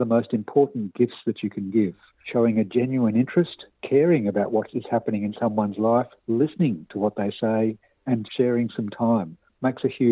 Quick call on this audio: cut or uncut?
cut